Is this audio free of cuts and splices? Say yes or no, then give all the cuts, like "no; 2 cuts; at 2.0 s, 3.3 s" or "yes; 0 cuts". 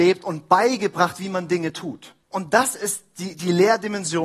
no; 1 cut; at 2.2 s